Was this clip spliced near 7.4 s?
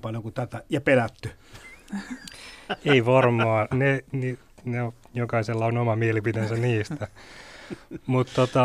no; 1 cut; at 3.7 s

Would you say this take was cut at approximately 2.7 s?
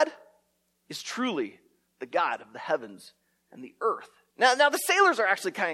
no; 1 cut; at 4.3 s

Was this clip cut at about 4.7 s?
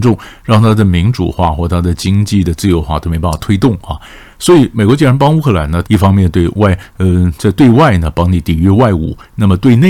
yes; 2 cuts; at 4.7 s, 5.8 s

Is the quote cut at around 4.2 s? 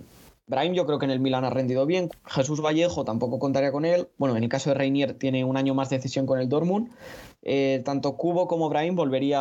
yes; 2 cuts; at 2.1 s, 4.2 s

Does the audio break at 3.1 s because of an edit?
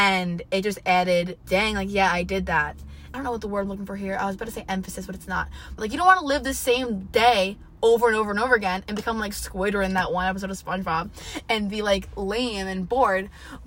yes; 3 cuts; at 1.4 s, 3.1 s, 5.8 s

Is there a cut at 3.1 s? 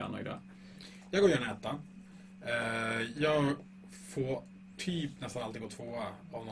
no; 0 cuts

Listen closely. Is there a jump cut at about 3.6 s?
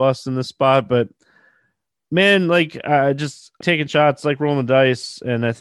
yes; 1 cut; at 3.6 s

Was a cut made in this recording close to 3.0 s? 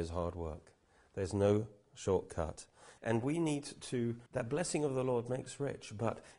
yes; 2 cuts; at 3.0 s, 4.3 s

